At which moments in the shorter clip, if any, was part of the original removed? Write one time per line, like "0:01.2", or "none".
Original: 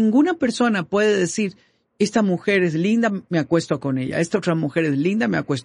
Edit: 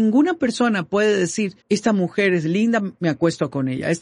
0:01.6